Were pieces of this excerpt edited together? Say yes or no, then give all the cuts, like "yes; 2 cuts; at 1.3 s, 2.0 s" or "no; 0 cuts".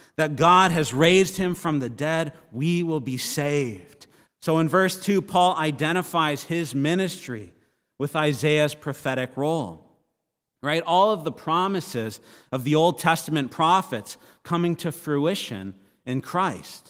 yes; 1 cut; at 4.3 s